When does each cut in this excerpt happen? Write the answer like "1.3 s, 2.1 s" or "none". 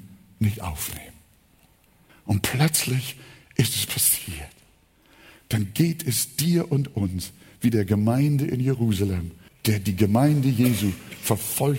2.1 s, 9.5 s